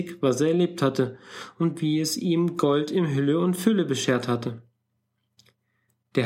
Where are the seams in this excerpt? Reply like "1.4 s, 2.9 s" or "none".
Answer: none